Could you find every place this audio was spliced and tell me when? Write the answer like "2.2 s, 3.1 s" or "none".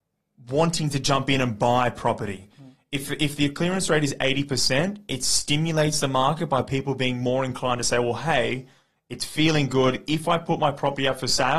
none